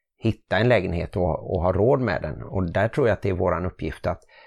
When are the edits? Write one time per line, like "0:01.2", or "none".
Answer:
none